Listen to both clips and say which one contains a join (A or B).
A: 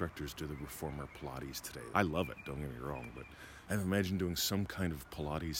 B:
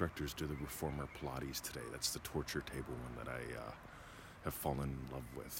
A